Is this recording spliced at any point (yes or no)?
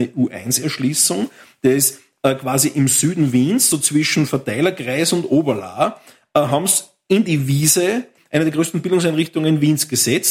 no